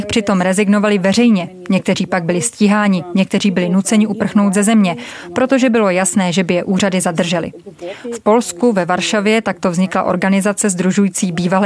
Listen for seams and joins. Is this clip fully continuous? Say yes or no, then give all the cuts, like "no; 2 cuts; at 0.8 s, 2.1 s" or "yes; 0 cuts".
yes; 0 cuts